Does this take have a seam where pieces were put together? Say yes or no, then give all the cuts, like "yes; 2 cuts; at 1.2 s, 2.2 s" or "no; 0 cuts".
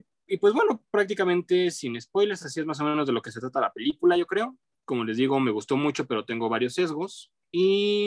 no; 0 cuts